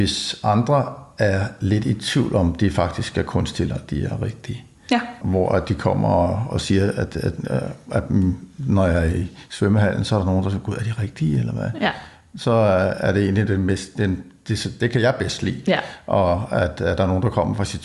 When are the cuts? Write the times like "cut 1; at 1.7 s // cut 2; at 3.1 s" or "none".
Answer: cut 1; at 6.5 s